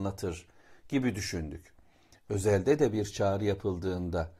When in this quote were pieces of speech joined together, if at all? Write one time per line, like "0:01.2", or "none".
none